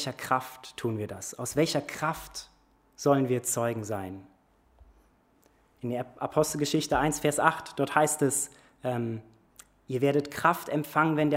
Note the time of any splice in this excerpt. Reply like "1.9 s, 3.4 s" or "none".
none

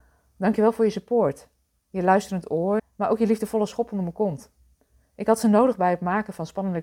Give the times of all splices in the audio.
2.8 s

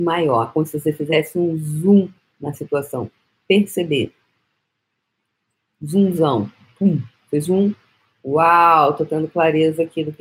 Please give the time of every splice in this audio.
7.4 s

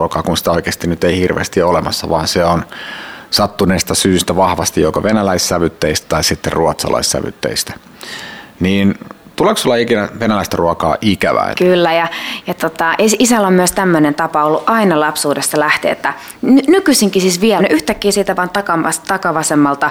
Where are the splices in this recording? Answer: 11.5 s, 17.6 s

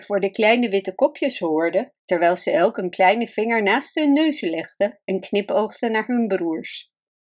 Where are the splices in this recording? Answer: 2.0 s

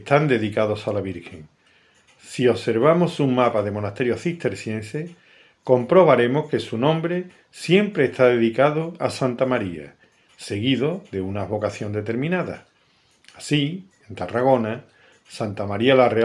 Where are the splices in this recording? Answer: 14.0 s

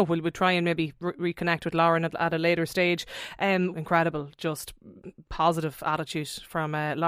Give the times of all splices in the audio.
3.7 s

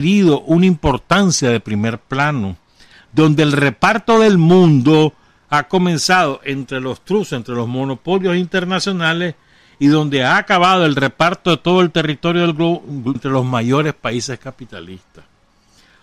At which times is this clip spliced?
13.2 s

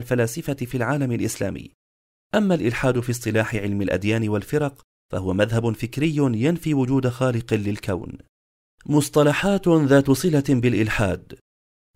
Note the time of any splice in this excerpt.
none

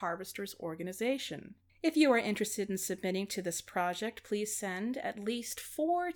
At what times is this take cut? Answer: none

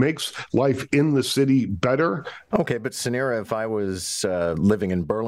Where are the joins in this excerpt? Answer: 2.5 s

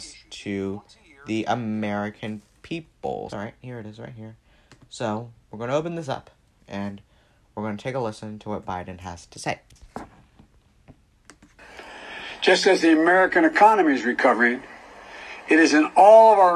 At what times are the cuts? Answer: 3.3 s

